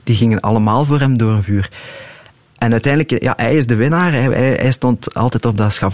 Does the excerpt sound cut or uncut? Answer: uncut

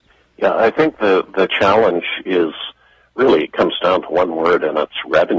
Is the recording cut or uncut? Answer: uncut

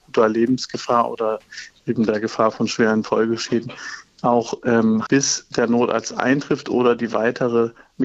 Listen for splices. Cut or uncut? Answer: cut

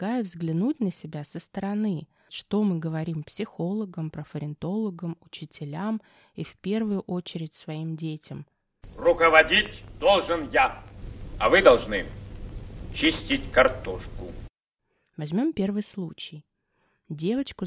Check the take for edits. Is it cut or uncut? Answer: cut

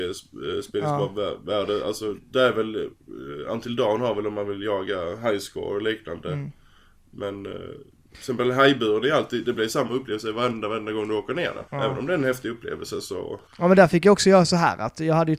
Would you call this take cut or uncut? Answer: cut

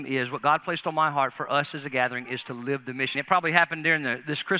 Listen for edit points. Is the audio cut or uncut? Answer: cut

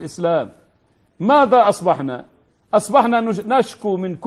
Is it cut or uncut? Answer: uncut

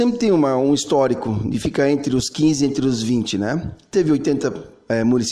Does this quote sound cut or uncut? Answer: uncut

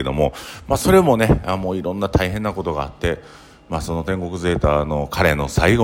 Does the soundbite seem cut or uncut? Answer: uncut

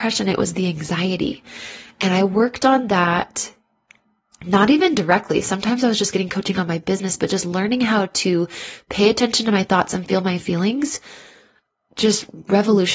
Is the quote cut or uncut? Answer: uncut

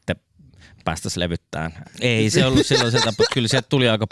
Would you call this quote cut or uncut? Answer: cut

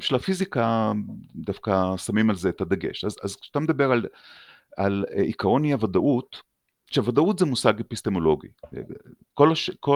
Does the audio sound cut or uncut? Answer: uncut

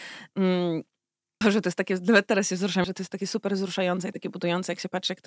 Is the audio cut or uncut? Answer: cut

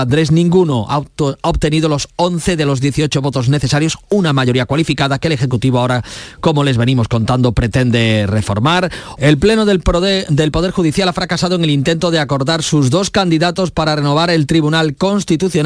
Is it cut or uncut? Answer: cut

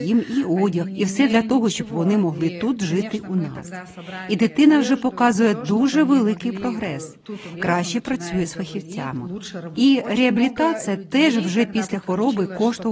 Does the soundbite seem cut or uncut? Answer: cut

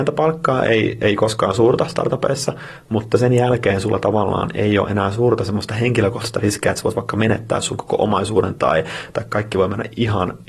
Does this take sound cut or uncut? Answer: uncut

